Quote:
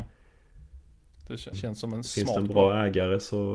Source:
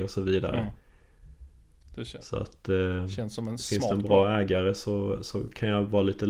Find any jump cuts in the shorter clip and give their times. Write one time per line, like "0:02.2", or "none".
0:01.5